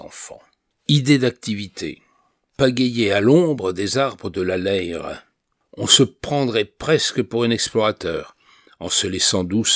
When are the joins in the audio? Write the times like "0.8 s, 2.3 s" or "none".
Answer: none